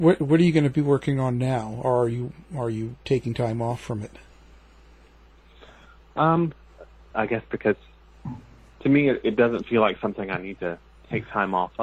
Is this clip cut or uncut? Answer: cut